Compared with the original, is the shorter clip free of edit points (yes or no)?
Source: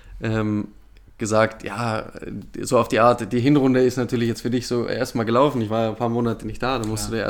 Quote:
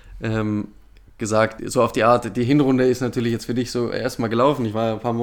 no